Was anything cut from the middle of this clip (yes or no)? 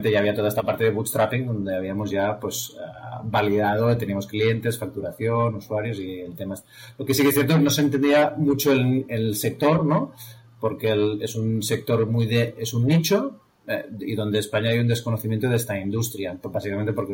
no